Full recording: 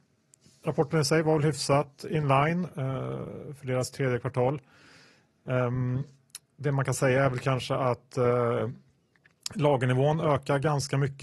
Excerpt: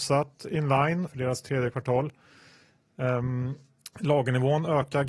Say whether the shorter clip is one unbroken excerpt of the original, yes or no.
no